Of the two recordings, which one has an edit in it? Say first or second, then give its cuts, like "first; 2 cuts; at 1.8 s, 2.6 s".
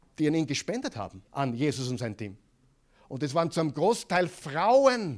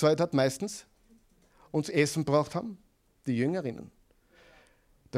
first; 1 cut; at 1.3 s